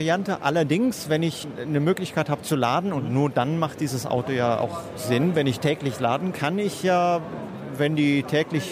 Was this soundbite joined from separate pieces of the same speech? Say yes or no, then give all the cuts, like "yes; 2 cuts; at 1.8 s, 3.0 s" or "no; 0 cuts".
yes; 1 cut; at 6.3 s